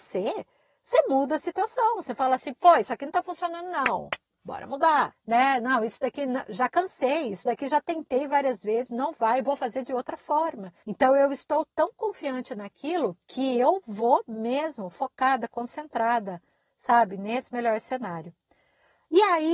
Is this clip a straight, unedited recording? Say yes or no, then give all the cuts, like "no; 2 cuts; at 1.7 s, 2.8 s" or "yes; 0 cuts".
no; 2 cuts; at 5.1 s, 10.8 s